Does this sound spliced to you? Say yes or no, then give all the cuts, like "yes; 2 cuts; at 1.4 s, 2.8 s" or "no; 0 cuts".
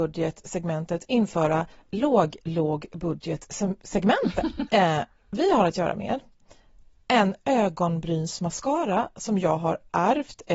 yes; 1 cut; at 4.7 s